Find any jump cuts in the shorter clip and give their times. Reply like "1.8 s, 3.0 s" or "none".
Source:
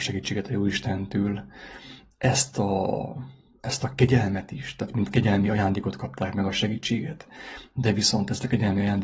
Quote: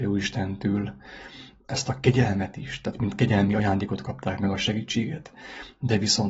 1.6 s